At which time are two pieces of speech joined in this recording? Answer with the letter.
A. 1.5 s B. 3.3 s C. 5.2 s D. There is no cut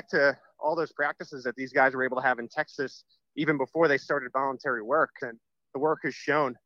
C